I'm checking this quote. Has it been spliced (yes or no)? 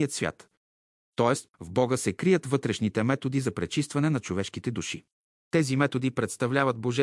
yes